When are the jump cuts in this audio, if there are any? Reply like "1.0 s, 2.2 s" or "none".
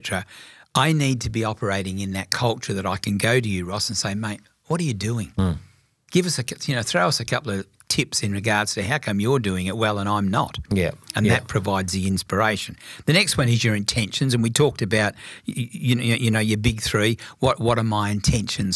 none